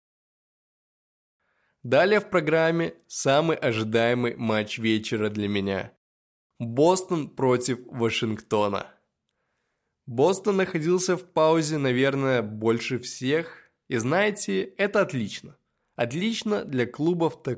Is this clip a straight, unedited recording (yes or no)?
yes